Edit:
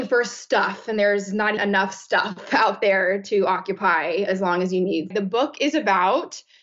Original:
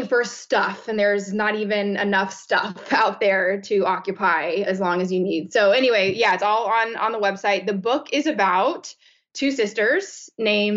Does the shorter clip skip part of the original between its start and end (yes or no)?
yes